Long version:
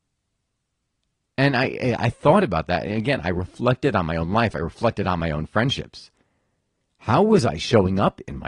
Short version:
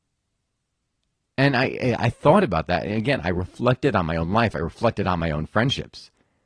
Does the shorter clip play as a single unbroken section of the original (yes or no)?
yes